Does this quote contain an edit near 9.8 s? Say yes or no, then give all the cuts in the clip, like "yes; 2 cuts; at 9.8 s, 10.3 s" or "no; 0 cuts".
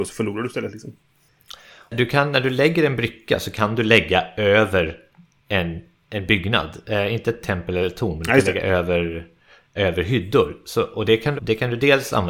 yes; 2 cuts; at 9.8 s, 11.4 s